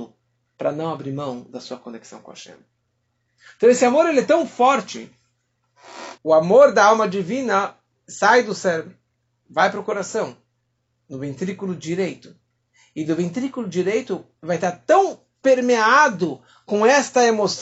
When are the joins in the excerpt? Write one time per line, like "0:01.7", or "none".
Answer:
0:06.2